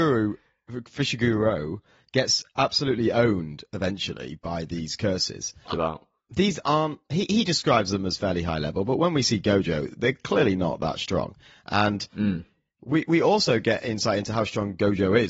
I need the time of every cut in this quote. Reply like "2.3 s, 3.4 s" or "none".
5.7 s